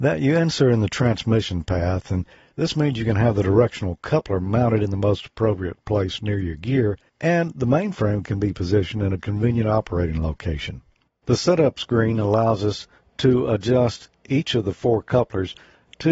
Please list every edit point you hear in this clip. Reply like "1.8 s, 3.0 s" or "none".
11.1 s